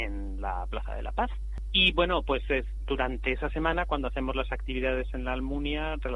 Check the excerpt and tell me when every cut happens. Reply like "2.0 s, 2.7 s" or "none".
none